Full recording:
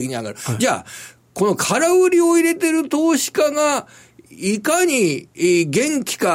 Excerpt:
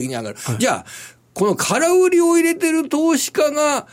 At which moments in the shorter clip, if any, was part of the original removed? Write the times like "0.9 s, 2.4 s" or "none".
none